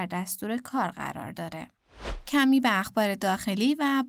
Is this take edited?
no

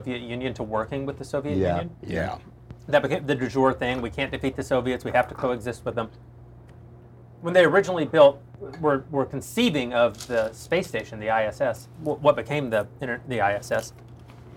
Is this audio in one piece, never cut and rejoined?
yes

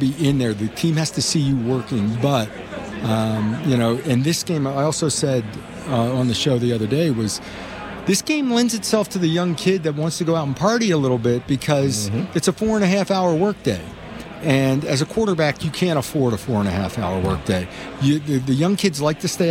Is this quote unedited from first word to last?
no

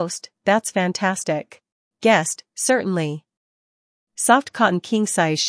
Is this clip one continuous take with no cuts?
no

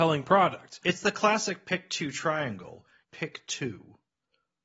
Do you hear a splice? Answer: yes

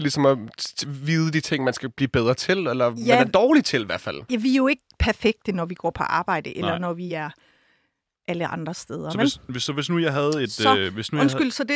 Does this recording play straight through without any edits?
yes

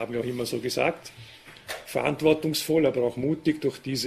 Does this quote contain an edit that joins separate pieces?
no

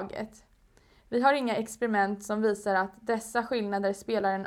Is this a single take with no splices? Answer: yes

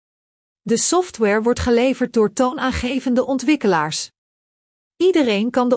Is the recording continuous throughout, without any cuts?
yes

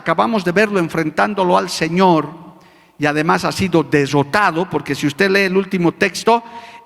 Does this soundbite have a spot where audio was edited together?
no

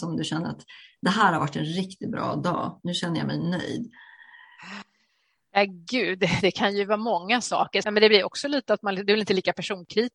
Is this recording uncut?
no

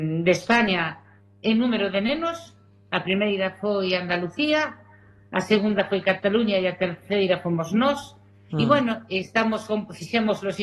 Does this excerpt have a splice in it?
yes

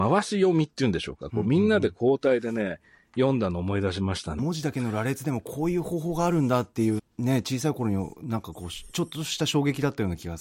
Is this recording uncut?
no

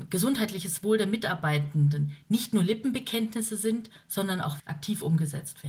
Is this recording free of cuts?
no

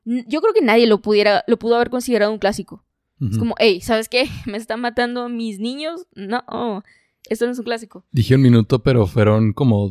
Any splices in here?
no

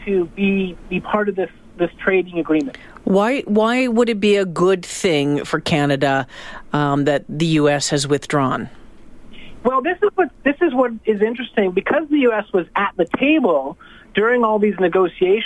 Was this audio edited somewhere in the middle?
no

